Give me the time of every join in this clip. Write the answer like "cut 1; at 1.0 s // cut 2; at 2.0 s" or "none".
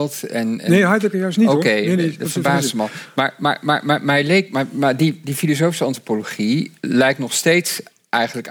none